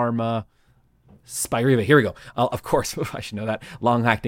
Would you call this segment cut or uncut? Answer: uncut